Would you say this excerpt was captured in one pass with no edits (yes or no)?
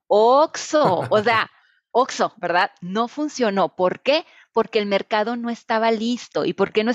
yes